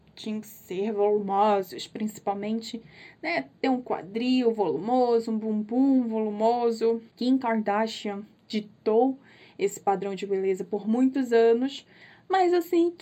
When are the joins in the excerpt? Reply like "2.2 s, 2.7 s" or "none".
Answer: none